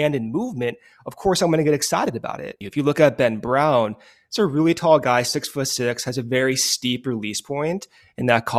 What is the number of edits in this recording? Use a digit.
1